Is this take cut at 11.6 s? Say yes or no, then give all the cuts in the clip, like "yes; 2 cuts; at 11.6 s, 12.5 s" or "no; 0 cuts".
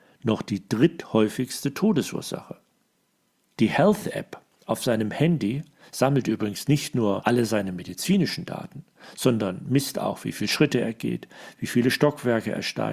no; 1 cut; at 3.6 s